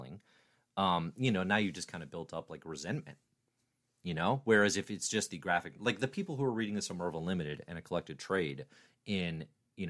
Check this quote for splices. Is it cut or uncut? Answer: uncut